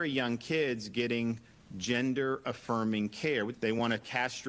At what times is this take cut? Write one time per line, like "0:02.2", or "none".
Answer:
0:03.5